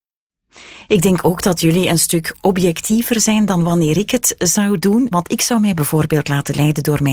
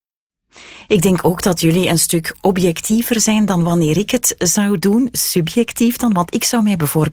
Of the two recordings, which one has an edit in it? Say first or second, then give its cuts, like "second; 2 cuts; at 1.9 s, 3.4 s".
first; 1 cut; at 5.1 s